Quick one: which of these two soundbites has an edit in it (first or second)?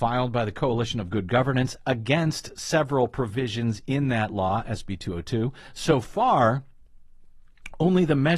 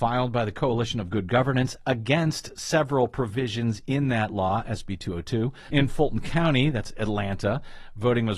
second